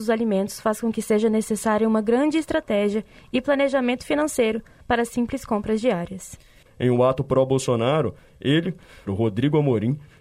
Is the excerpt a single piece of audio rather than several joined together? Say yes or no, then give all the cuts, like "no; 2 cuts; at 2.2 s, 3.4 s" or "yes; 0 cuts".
no; 2 cuts; at 6.7 s, 9.1 s